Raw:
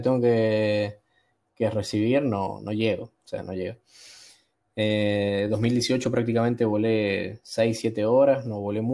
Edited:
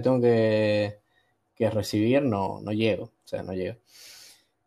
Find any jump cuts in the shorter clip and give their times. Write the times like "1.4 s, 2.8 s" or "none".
none